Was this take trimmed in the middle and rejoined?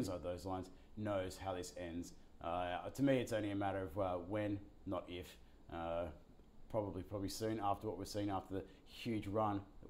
no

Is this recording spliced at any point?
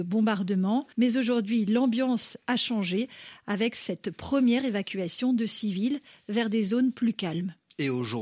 yes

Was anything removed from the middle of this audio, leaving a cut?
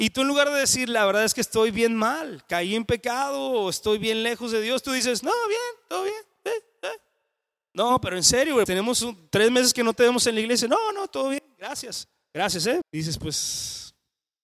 yes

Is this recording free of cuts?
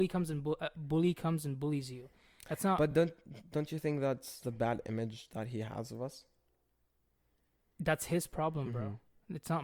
yes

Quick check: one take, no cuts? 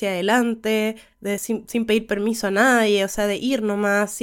yes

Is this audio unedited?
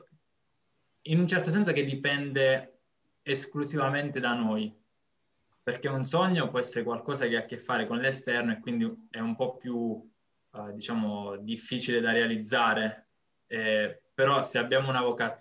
yes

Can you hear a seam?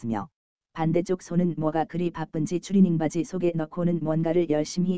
no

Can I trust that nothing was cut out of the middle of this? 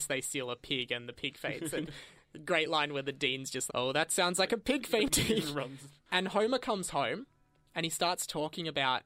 no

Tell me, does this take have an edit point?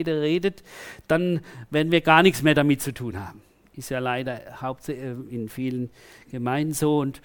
no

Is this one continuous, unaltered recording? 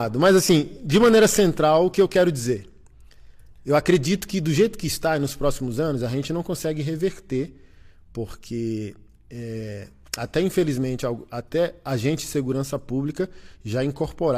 yes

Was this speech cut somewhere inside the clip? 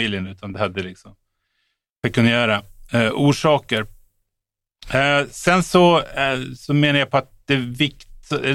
no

